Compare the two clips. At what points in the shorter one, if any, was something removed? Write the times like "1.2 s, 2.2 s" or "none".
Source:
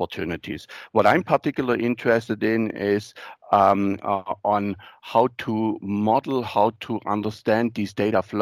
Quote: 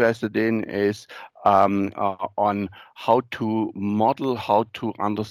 none